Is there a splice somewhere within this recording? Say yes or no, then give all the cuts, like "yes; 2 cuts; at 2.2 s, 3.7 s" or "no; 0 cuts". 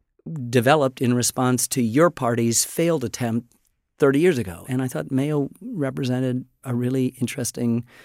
yes; 2 cuts; at 4.6 s, 6.6 s